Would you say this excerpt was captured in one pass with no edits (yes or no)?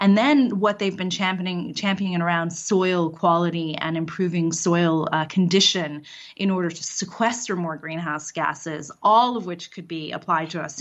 yes